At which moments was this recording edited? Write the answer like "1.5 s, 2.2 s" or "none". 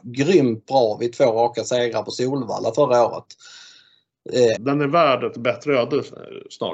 4.6 s